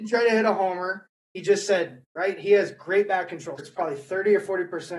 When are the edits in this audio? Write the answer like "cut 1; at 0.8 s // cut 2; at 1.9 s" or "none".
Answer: cut 1; at 2.0 s // cut 2; at 3.6 s